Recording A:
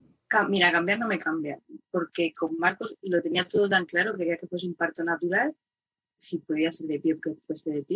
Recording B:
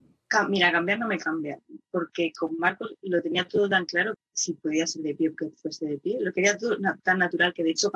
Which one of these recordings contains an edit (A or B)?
B